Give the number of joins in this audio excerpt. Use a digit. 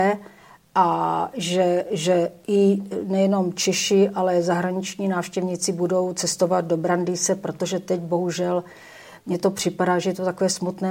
0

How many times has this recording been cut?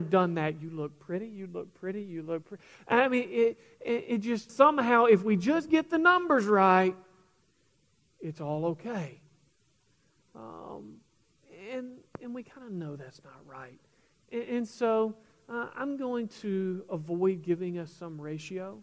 1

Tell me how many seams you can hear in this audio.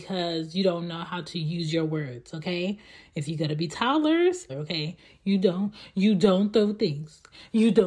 1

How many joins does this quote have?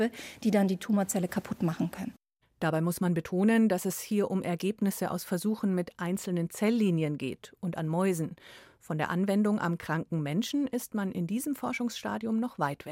0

